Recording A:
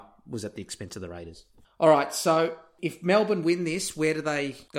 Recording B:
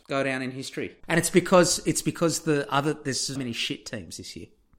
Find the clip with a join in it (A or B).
B